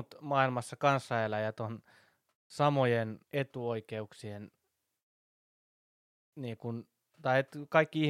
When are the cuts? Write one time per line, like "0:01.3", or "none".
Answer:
0:03.2